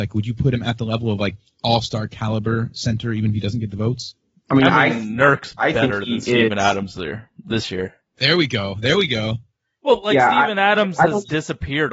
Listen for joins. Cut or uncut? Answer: uncut